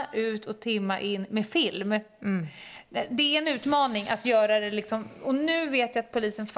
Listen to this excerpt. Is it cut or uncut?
uncut